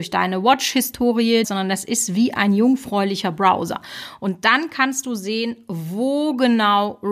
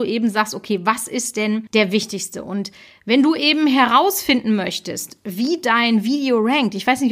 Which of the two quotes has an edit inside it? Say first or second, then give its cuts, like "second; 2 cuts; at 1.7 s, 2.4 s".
first; 1 cut; at 1.4 s